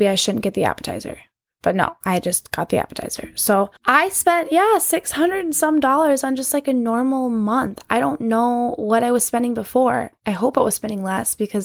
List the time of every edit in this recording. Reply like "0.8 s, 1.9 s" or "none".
3.8 s, 10.1 s